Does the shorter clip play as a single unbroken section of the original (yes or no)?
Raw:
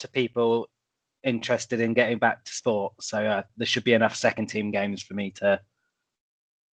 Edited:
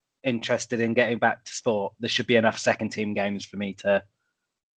no